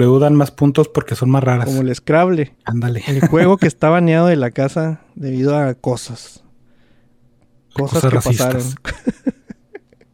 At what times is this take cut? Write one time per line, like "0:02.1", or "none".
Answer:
0:02.6